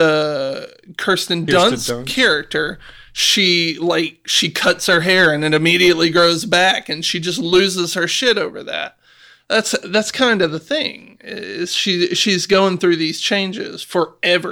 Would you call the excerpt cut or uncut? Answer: uncut